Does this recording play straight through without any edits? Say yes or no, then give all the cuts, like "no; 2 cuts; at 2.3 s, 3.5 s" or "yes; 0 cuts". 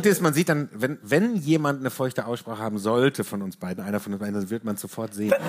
yes; 0 cuts